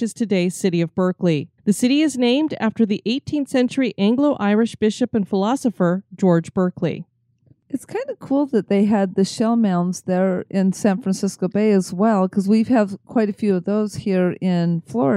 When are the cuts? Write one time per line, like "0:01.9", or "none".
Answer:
0:01.6